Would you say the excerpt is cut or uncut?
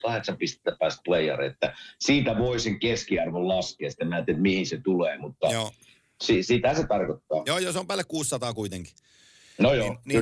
uncut